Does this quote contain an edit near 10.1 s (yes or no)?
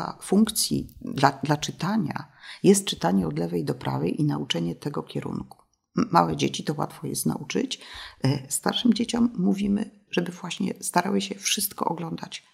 yes